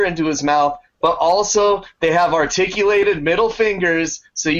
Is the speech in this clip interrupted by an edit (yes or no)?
no